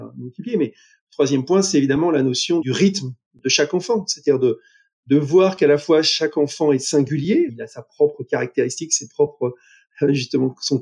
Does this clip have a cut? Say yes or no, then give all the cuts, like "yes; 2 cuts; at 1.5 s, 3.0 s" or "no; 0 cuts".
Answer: yes; 2 cuts; at 2.6 s, 7.5 s